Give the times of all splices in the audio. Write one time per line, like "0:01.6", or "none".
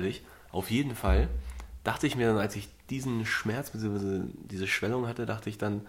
none